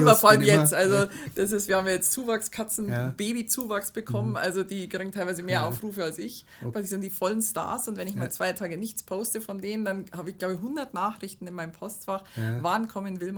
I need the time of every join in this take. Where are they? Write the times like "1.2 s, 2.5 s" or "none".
6.7 s